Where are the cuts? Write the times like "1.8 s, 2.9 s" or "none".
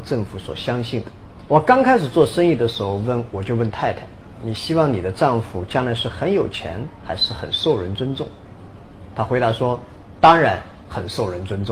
1.5 s